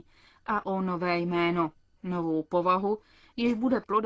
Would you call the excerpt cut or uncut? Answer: uncut